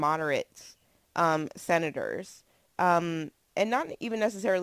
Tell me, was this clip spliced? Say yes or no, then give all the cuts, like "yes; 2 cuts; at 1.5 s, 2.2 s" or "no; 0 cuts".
no; 0 cuts